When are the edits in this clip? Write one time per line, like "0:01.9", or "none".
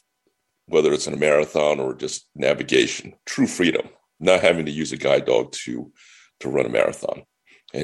0:03.2